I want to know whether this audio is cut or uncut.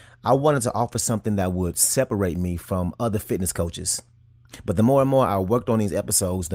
uncut